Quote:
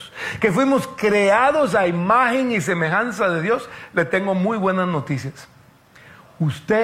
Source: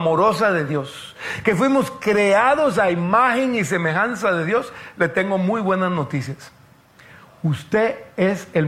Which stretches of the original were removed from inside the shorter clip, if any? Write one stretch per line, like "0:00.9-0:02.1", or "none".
none